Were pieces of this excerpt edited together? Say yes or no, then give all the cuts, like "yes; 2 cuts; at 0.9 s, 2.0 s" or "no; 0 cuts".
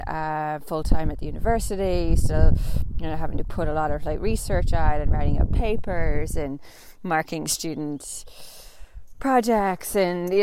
no; 0 cuts